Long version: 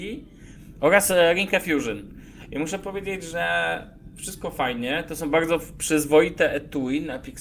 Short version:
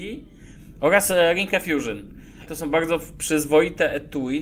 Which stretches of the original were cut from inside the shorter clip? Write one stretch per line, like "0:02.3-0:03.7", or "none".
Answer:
0:02.5-0:05.1